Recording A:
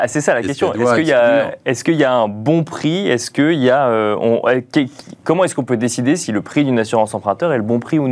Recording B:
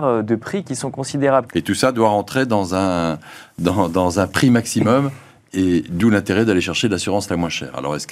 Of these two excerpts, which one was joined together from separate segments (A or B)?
B